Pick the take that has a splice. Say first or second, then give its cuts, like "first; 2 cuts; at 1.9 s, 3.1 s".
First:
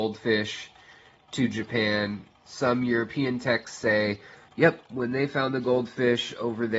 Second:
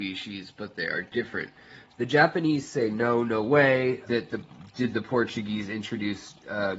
second; 2 cuts; at 1.9 s, 4.0 s